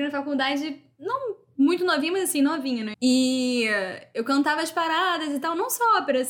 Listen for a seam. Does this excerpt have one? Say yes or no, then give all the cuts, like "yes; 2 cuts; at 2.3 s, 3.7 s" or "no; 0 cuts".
yes; 1 cut; at 2.9 s